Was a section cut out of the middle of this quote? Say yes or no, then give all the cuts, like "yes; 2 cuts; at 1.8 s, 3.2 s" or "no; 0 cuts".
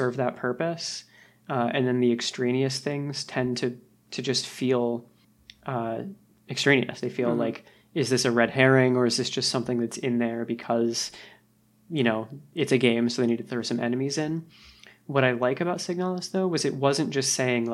yes; 1 cut; at 7.0 s